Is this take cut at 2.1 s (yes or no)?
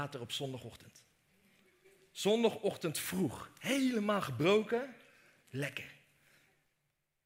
no